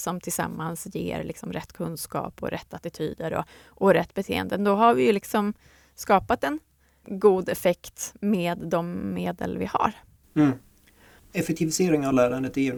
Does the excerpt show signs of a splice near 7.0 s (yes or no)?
yes